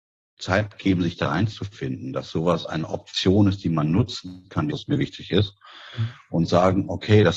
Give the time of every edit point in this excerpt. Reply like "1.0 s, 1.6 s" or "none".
4.7 s

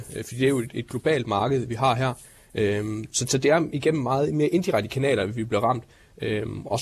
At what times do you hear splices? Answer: none

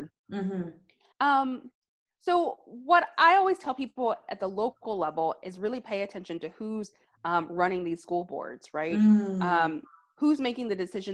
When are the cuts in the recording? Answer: 1.1 s

